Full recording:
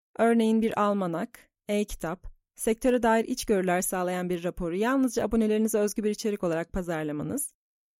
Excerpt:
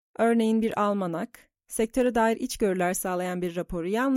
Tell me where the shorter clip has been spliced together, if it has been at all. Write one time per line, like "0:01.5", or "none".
0:01.6